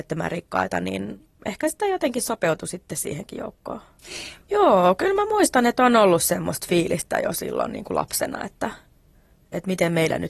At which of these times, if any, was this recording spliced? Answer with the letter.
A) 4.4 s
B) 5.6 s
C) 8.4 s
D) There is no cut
A